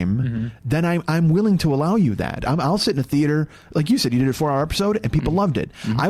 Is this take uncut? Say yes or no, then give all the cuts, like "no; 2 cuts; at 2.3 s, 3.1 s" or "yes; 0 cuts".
yes; 0 cuts